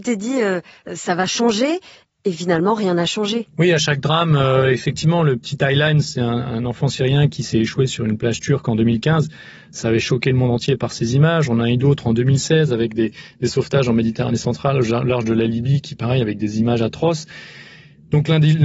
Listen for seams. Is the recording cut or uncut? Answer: uncut